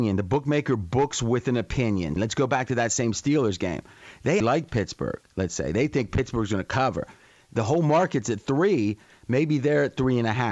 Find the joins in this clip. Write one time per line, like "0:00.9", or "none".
0:02.2
0:04.4